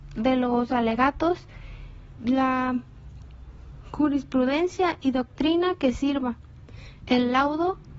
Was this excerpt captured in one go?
no; 2 cuts; at 2.2 s, 7.0 s

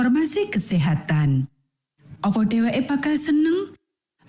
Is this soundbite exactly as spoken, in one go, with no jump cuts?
no; 1 cut; at 2.2 s

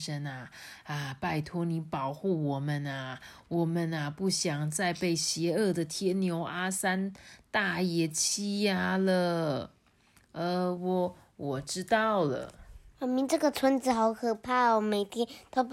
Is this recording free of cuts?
yes; 0 cuts

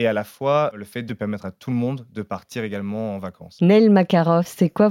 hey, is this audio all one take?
yes; 0 cuts

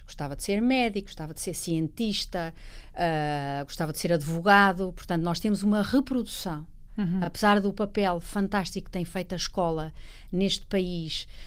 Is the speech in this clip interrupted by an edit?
no; 0 cuts

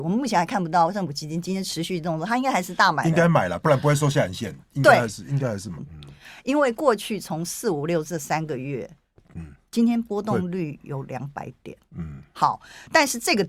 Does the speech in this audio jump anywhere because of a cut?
yes; 2 cuts; at 5.8 s, 9.2 s

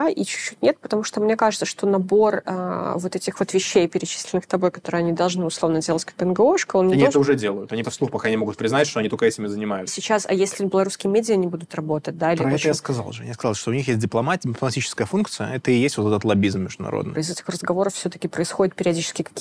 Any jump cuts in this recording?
yes; 3 cuts; at 7.8 s, 9.9 s, 17.1 s

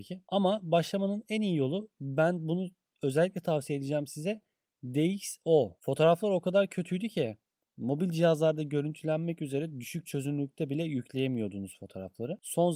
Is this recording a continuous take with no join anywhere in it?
no; 1 cut; at 5.8 s

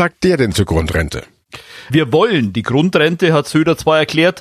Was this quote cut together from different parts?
yes; 1 cut; at 1.9 s

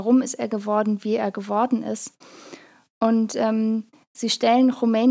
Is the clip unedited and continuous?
yes; 0 cuts

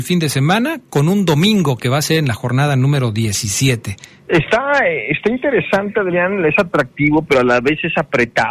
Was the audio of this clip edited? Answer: yes; 1 cut; at 4.3 s

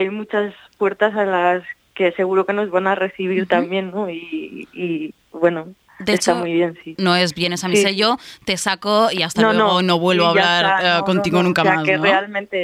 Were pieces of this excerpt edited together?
yes; 1 cut; at 7.0 s

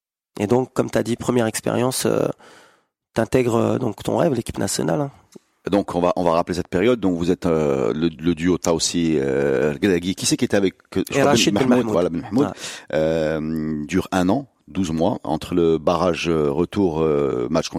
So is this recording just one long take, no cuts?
yes; 0 cuts

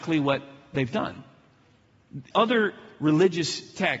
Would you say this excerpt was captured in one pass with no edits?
no; 1 cut; at 2.3 s

